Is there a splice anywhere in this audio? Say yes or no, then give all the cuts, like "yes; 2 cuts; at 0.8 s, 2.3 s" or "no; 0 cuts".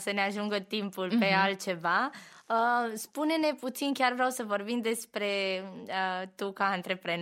no; 0 cuts